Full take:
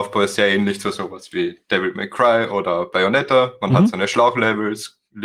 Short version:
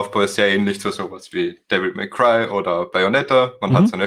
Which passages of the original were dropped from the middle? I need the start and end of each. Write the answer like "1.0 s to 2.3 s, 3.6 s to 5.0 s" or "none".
none